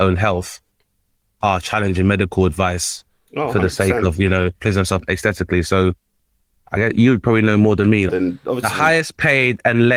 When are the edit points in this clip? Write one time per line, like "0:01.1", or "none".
0:08.1